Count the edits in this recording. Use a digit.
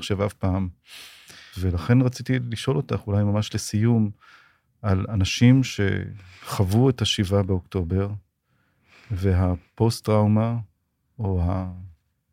1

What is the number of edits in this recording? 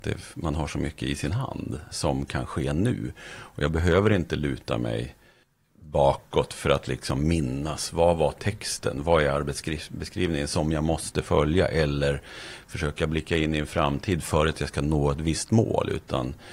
1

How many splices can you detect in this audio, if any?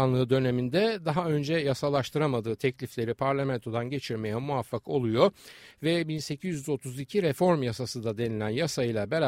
0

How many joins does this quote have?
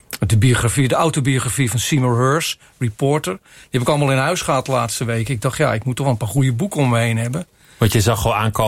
0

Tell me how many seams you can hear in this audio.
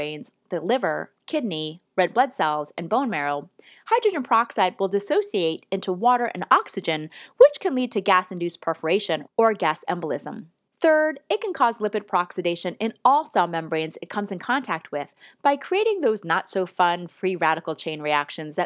0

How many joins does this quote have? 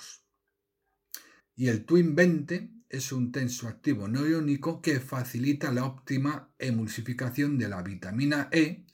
1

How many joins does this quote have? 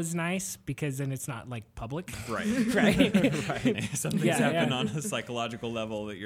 1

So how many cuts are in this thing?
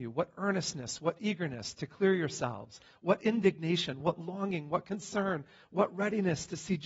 1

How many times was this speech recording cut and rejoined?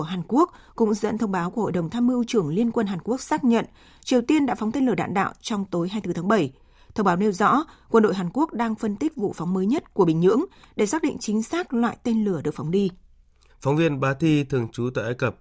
1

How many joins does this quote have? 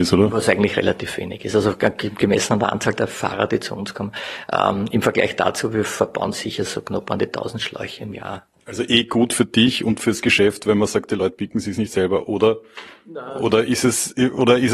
0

